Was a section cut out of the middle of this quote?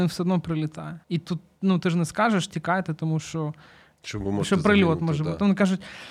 yes; 2 cuts; at 1.0 s, 3.9 s

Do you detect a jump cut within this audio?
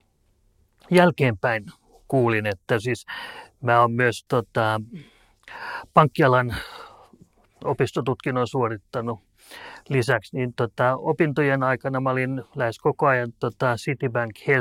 yes; 1 cut; at 4.3 s

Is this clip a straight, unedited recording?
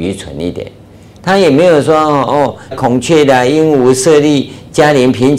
no; 2 cuts; at 1.2 s, 2.7 s

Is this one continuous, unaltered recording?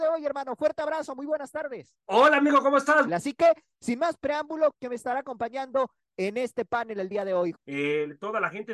no; 3 cuts; at 3.1 s, 4.8 s, 7.5 s

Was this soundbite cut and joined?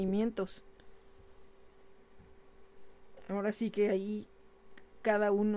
no; 0 cuts

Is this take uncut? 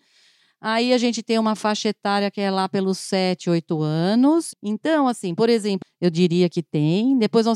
no; 2 cuts; at 4.5 s, 5.8 s

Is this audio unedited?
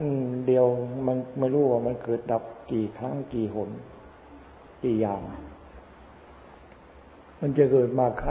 yes; 0 cuts

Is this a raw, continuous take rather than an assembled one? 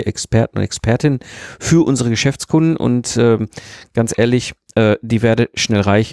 yes; 0 cuts

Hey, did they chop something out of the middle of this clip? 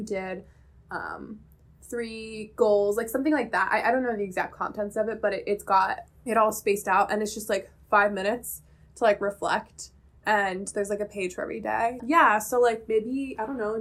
yes; 2 cuts; at 6.1 s, 12.0 s

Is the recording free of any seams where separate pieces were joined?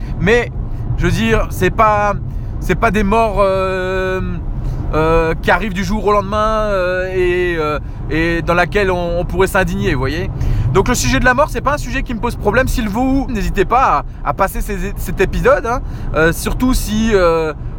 no; 1 cut; at 13.3 s

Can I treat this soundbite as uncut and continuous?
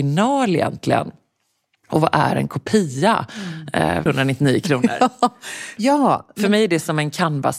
no; 2 cuts; at 4.1 s, 5.8 s

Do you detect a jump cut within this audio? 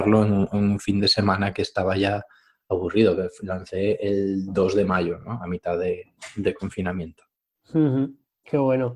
no; 0 cuts

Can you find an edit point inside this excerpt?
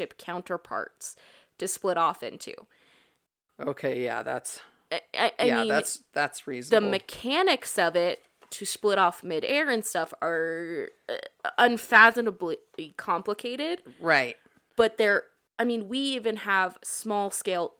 no; 0 cuts

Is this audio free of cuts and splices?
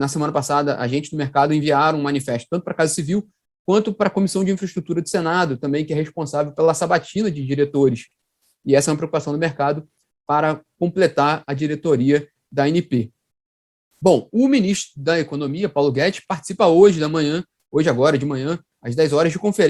yes; 0 cuts

